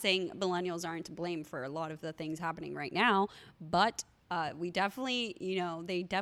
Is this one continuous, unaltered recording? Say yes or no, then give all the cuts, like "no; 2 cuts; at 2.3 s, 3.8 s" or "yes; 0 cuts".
yes; 0 cuts